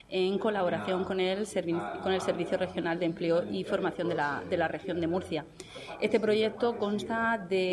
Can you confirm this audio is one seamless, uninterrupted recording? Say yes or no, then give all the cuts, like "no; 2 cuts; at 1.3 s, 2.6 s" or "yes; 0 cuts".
yes; 0 cuts